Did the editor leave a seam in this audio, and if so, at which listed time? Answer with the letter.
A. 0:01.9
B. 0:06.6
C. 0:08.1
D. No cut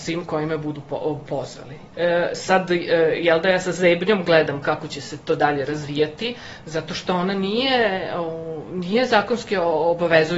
A